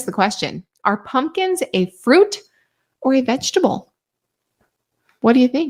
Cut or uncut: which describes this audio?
uncut